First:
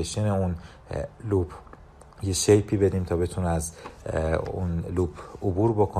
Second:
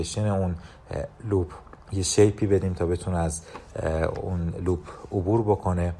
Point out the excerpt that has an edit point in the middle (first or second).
second